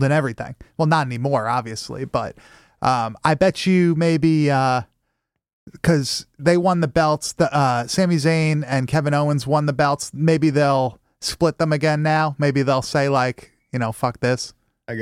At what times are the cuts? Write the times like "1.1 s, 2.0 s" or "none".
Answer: none